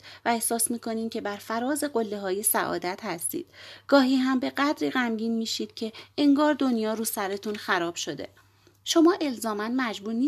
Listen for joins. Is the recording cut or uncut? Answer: uncut